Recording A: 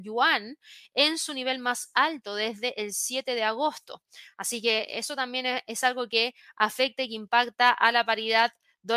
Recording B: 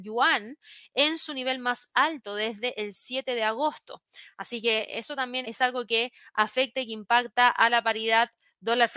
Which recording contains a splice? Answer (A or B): B